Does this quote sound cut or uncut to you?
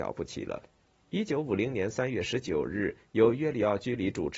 cut